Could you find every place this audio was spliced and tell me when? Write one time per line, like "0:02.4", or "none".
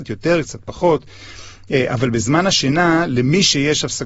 none